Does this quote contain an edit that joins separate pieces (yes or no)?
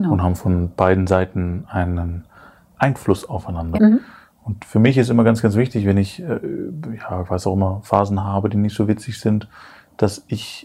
yes